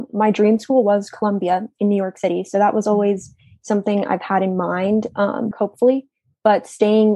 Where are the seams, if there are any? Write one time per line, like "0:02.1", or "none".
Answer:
0:05.5